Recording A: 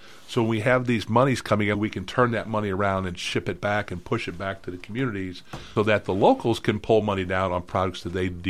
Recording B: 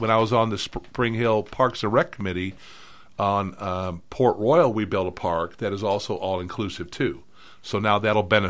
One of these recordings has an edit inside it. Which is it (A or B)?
A